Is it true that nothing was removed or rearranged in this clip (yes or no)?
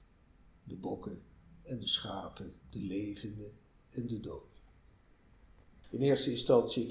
no